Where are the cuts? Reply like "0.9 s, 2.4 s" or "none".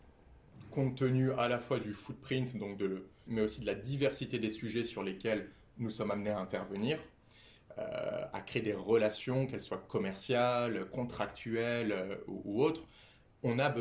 3.3 s

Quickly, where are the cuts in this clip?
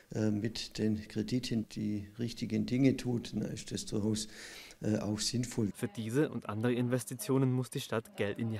1.6 s, 5.7 s

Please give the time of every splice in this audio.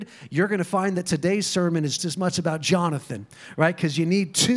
2.0 s

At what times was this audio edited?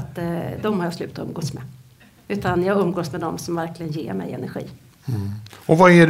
none

